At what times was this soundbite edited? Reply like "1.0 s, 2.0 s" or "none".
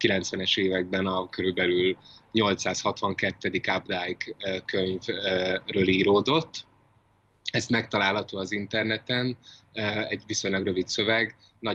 none